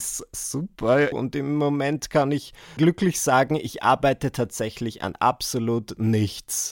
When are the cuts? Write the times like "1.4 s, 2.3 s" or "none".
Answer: 1.1 s, 2.8 s

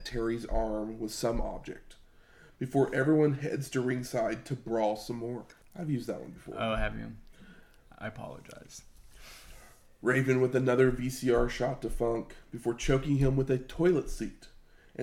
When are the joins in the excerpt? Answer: 5.6 s

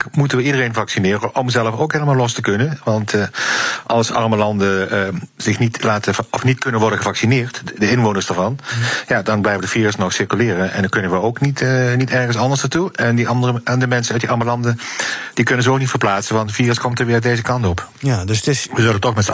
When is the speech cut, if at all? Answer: none

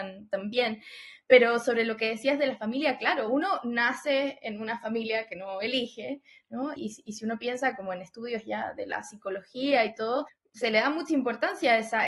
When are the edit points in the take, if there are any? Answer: 6.8 s

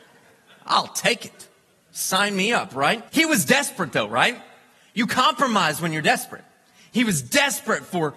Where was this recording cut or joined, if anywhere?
3.1 s

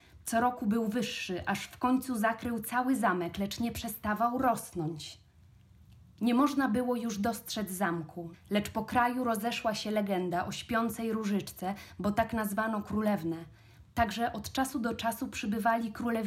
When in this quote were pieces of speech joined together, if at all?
8.3 s

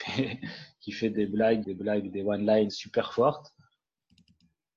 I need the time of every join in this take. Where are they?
1.6 s, 2.7 s

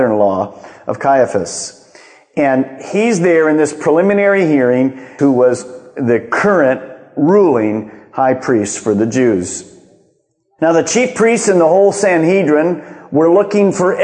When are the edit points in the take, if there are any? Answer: 5.2 s

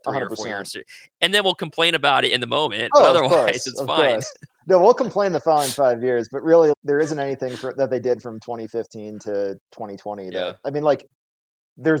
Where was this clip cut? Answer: 6.7 s

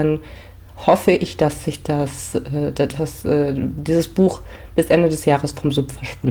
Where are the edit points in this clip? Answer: none

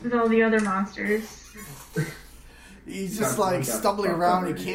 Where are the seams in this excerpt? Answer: none

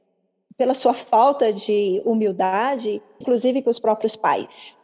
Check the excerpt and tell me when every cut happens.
3.2 s

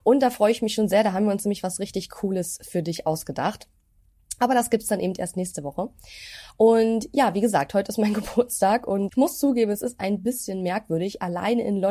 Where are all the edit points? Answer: 9.1 s

